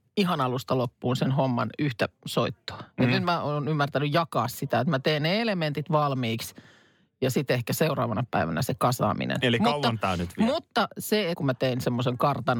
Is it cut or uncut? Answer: cut